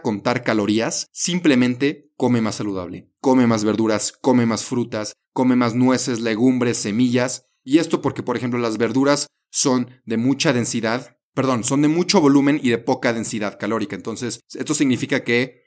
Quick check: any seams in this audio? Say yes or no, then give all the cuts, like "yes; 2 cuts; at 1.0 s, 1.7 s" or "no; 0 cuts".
no; 0 cuts